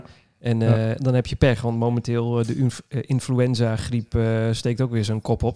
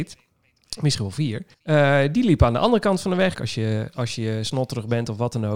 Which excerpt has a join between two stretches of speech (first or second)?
second